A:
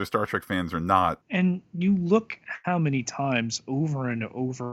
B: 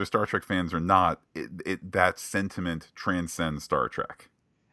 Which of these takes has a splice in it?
A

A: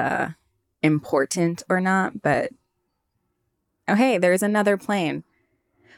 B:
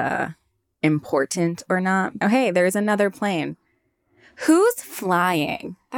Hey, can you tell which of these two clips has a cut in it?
B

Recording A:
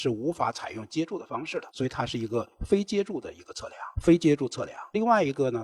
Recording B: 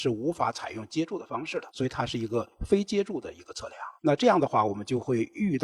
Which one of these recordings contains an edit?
A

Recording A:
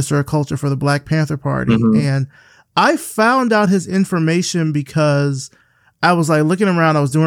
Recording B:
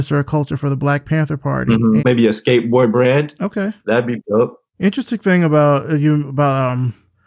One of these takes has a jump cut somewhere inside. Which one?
B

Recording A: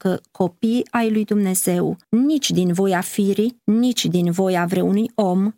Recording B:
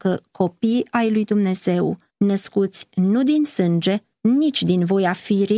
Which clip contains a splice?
A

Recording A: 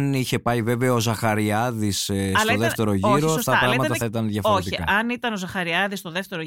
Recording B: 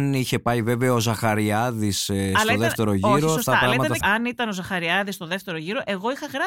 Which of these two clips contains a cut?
B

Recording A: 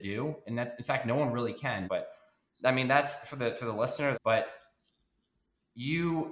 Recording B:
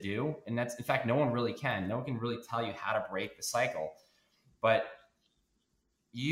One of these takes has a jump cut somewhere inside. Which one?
A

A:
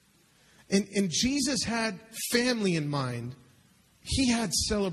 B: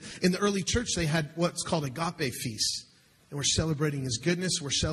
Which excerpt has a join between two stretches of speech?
B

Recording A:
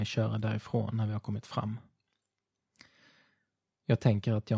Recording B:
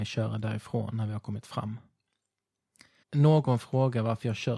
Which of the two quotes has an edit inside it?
B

